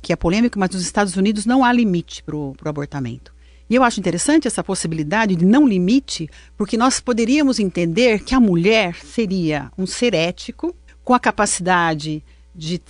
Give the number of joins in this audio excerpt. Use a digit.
1